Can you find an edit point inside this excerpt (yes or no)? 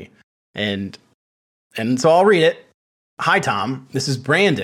no